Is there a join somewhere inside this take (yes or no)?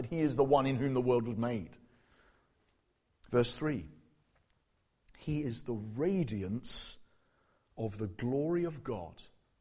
no